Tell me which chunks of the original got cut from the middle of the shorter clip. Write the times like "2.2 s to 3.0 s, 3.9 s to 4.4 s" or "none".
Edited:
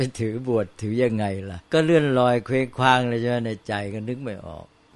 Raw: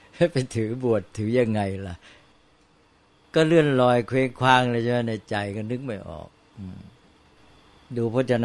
2.0 s to 3.3 s